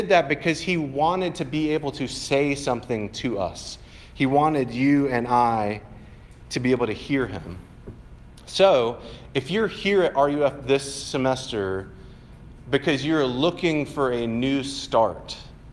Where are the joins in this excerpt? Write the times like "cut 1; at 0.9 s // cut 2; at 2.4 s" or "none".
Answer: none